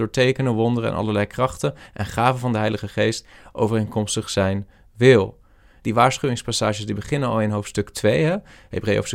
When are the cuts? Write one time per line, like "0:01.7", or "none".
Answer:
0:05.8